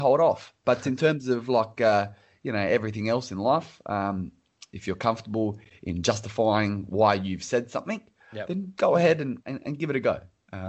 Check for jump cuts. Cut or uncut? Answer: uncut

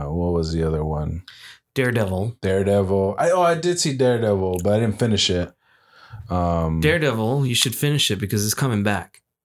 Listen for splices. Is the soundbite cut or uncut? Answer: uncut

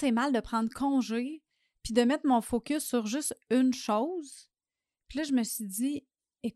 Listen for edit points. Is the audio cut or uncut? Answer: uncut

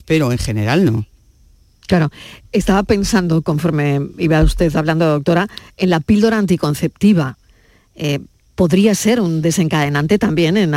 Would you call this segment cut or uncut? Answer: uncut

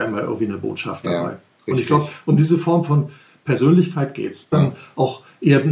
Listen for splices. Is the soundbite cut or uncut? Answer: cut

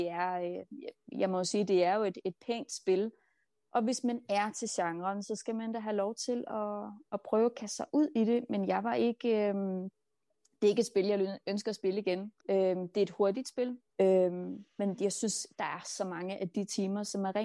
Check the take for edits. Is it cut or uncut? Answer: cut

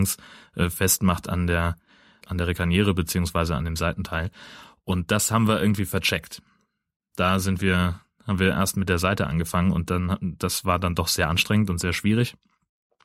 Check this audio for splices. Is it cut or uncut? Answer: cut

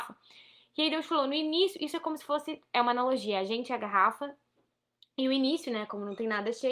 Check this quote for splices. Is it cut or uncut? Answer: uncut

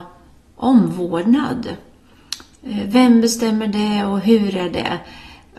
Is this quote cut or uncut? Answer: uncut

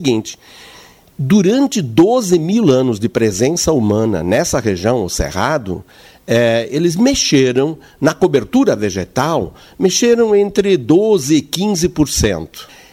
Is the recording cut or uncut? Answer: uncut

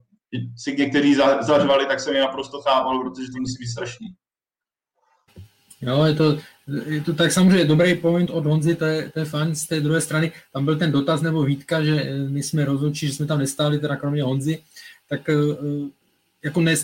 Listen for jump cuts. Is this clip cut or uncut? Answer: cut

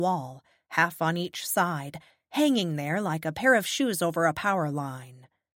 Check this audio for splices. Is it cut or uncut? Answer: uncut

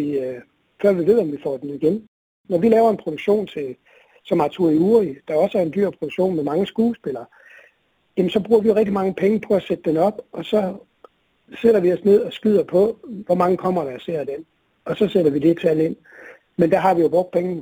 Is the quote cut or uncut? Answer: uncut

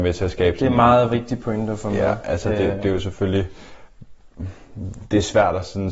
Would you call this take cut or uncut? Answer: uncut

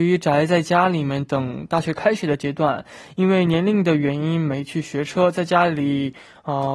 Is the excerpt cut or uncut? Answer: uncut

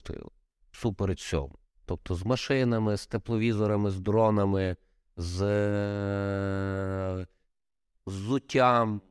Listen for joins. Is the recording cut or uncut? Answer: cut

